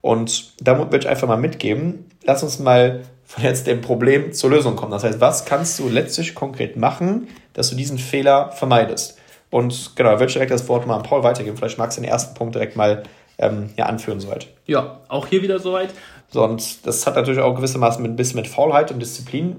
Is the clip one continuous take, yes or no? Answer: no